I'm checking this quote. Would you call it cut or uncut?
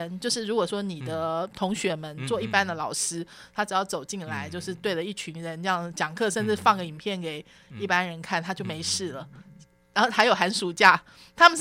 uncut